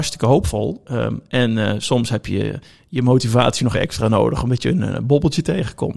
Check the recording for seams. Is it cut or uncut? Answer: cut